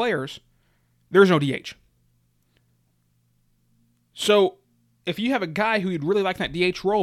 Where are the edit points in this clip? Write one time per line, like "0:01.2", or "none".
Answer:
none